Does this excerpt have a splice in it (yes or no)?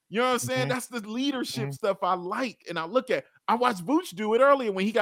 no